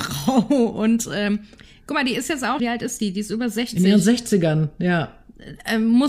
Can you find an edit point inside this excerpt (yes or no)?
yes